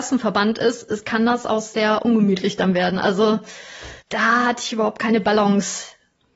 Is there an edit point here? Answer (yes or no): yes